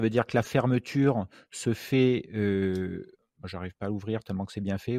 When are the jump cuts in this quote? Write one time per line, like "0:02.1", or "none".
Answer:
none

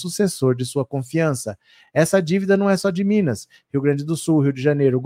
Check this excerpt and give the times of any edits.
none

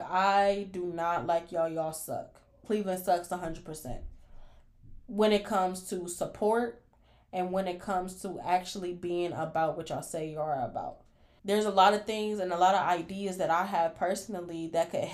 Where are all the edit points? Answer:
0:11.4

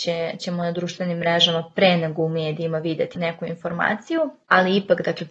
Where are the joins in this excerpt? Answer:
0:03.2

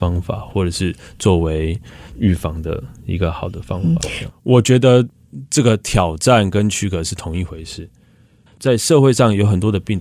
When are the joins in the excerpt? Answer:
0:04.3
0:08.5

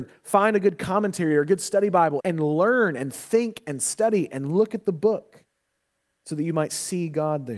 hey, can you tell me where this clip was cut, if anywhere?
0:02.2

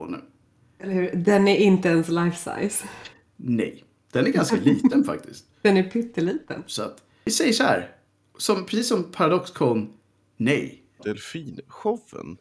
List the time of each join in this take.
0:06.7
0:11.0

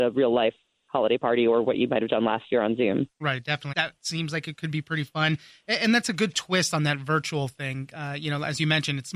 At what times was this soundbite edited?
0:03.7

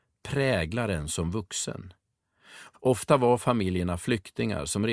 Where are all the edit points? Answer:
0:02.7

